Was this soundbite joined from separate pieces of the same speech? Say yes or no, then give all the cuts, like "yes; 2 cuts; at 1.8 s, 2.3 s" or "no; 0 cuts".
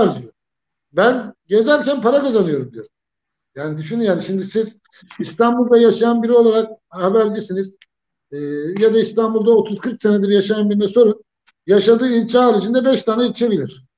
no; 0 cuts